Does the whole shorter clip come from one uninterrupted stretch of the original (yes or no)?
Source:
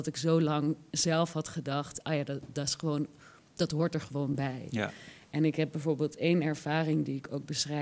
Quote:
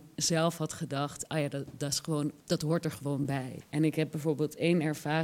no